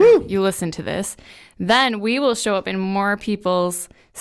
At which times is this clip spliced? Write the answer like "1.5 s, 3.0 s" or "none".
none